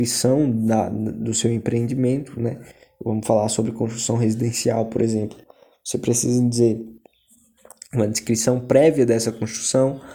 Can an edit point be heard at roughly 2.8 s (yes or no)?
no